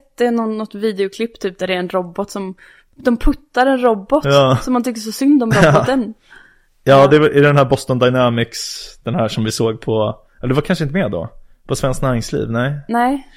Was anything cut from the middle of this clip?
no; 0 cuts

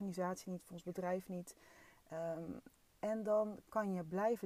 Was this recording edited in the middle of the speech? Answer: no; 0 cuts

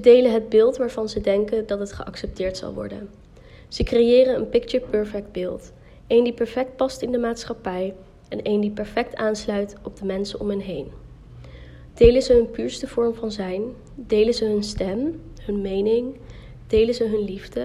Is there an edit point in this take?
no; 0 cuts

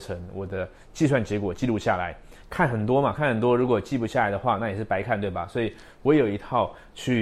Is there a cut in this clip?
yes; 1 cut; at 2.4 s

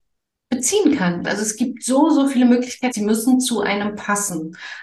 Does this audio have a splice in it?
yes; 2 cuts; at 1.2 s, 2.9 s

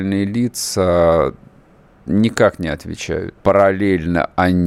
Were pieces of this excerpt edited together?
yes; 1 cut; at 3.3 s

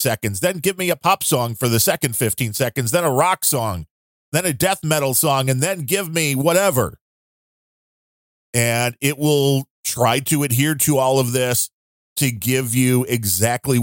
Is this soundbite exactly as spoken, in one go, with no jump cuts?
yes; 0 cuts

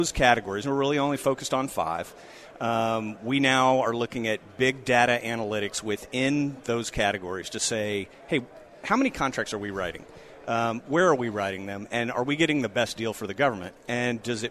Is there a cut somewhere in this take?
no; 0 cuts

